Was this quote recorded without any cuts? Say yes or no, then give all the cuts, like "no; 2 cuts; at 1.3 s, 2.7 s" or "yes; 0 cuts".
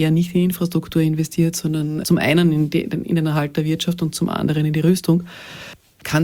yes; 0 cuts